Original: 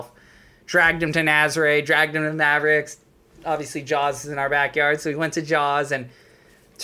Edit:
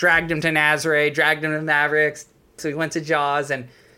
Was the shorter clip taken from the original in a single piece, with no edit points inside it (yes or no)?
no